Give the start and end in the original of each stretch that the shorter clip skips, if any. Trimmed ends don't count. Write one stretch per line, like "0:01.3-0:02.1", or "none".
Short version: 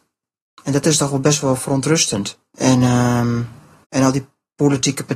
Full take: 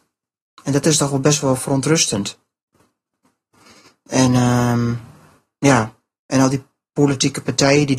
0:02.5-0:04.0
0:05.4-0:06.2